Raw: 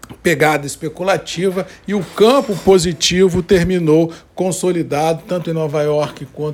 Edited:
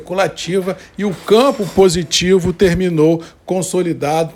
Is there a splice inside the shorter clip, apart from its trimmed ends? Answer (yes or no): no